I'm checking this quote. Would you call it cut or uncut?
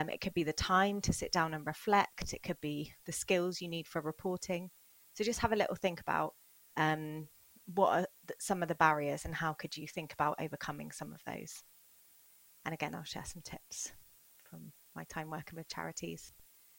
uncut